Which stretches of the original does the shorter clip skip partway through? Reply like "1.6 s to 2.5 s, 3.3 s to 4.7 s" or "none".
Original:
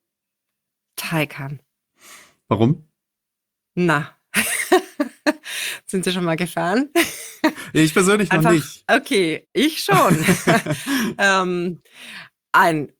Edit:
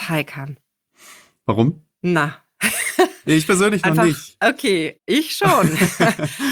3.0 s to 3.7 s, 5.0 s to 7.7 s

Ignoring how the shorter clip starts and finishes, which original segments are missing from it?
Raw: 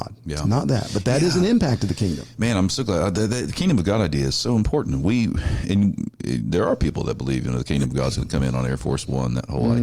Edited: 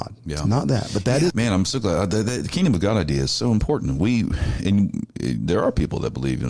1.3 s to 2.3 s

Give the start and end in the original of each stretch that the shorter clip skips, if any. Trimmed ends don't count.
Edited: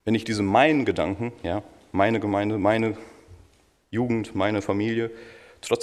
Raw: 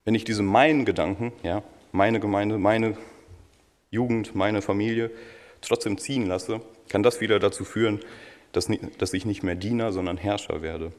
none

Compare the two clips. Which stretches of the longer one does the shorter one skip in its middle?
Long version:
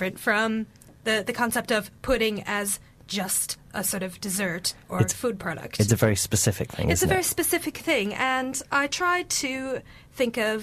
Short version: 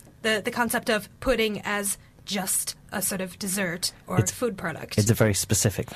none

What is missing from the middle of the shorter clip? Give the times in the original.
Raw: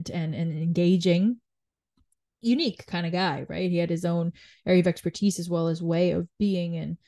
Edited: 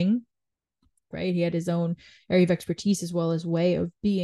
2.3 s to 3.5 s

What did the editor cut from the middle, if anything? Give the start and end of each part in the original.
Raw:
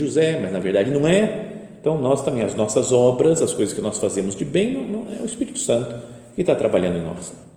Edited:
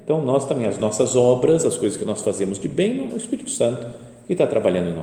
4.9 s to 5.2 s

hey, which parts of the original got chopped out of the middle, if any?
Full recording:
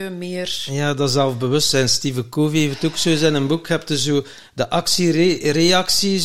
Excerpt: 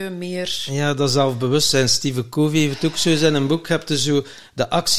none

